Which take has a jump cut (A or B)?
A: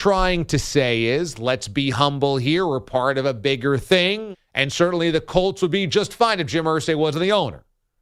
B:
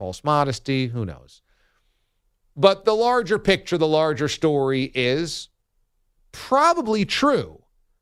A